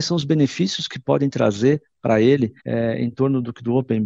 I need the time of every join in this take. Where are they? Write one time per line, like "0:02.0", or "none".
0:02.6